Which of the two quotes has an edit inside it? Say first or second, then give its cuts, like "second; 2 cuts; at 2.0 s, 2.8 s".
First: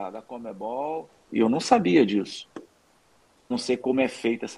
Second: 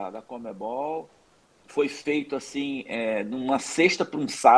first; 2 cuts; at 1.3 s, 3.5 s